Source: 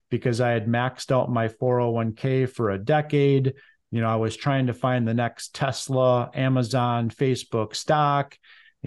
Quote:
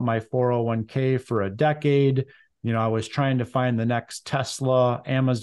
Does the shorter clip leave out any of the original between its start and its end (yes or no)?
no